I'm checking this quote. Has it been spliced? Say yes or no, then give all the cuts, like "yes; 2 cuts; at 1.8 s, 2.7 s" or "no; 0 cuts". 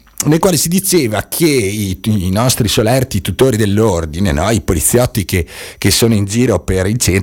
no; 0 cuts